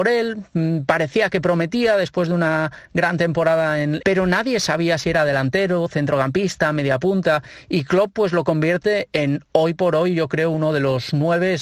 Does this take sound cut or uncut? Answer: cut